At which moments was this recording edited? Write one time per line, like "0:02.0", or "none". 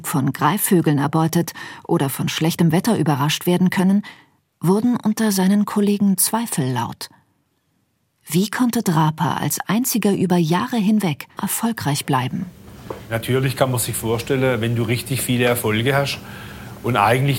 0:11.4